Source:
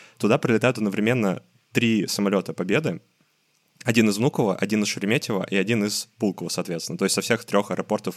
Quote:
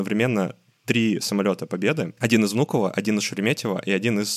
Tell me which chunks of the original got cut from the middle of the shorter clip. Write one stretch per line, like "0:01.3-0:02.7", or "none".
0:03.0-0:03.8